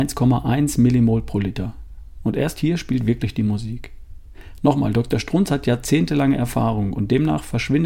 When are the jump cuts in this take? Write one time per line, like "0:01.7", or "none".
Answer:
none